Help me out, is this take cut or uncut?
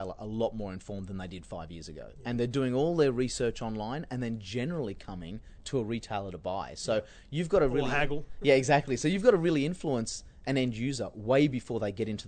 uncut